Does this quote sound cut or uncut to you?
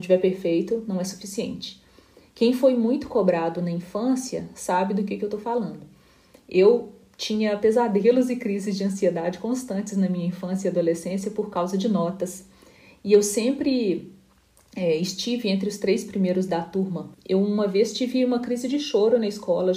cut